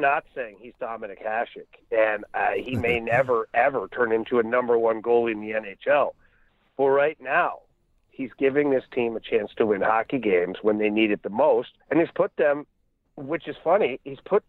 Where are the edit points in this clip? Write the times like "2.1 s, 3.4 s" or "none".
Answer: 8.1 s, 11.8 s